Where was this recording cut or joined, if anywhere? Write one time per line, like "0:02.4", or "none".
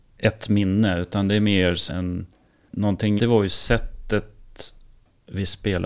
0:01.9
0:03.2

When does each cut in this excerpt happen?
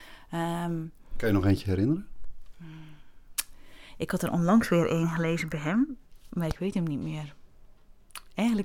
none

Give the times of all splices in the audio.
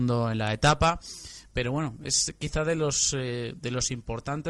none

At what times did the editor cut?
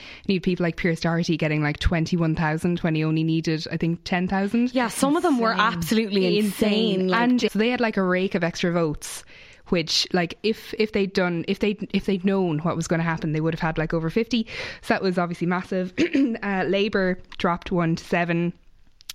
0:07.5

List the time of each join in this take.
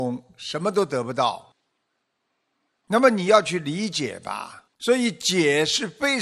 0:02.7
0:04.7

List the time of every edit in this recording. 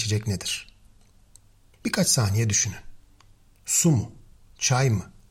none

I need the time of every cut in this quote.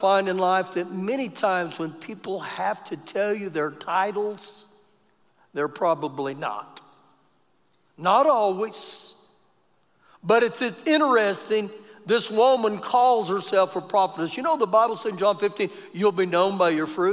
none

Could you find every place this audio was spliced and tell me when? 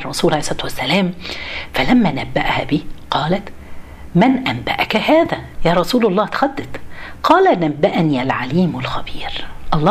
0:05.6

